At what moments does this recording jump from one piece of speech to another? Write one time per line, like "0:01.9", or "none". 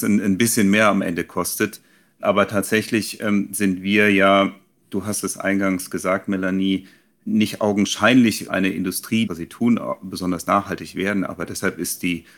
0:09.3